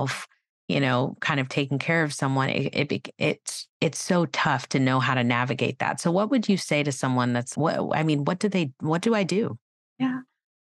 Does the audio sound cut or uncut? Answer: cut